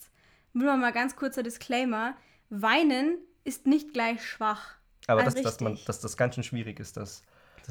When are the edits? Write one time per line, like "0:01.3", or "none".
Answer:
0:05.3